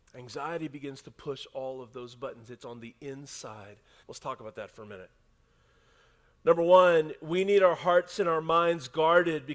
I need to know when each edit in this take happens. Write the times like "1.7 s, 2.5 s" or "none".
4.0 s